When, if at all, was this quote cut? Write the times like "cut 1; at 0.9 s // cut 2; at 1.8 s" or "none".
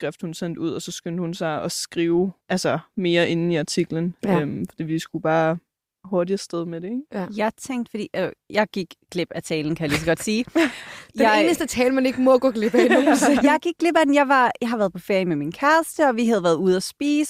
cut 1; at 2.4 s